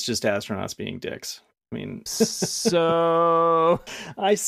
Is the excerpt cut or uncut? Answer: cut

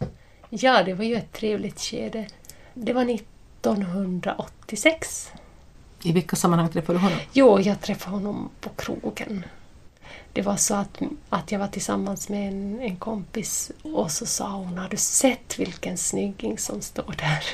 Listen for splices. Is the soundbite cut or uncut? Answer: uncut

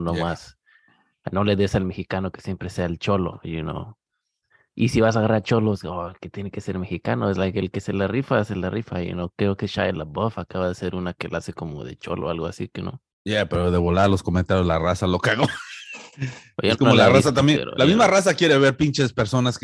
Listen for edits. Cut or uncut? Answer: uncut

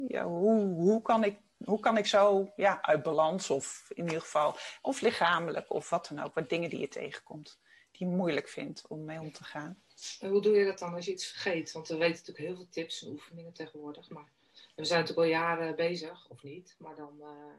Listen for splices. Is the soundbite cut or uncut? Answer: uncut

